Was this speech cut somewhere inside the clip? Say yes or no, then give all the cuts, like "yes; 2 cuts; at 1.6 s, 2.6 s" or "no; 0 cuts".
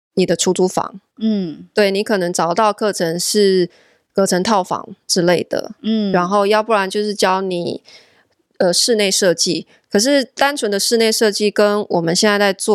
no; 0 cuts